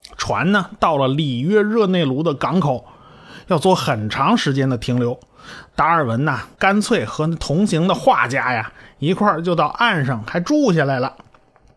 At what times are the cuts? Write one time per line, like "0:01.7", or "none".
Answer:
0:06.5
0:10.3